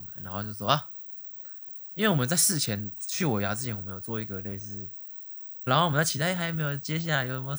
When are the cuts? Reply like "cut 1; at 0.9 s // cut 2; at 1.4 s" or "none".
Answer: cut 1; at 5.7 s